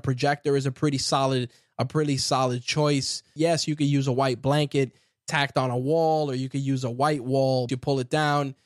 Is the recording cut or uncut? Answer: cut